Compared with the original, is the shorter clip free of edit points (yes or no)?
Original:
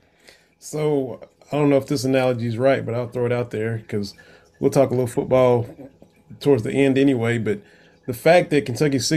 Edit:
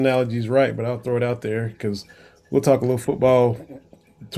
yes